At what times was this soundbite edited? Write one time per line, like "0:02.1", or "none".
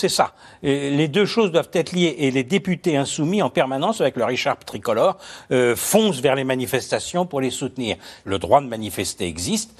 0:08.2